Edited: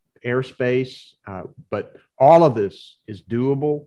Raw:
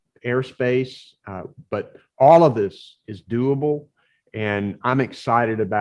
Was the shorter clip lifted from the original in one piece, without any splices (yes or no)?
yes